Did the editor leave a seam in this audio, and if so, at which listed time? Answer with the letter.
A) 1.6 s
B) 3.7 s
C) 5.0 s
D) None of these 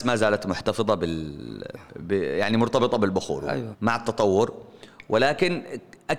B